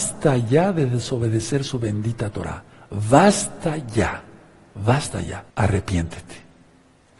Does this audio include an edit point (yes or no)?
yes